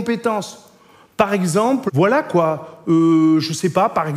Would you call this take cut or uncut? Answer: cut